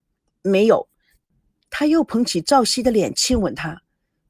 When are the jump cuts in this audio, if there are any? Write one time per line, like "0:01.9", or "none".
0:01.2